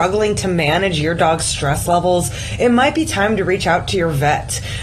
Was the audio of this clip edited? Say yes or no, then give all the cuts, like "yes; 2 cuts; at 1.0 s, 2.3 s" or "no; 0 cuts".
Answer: no; 0 cuts